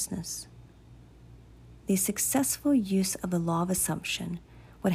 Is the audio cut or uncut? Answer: cut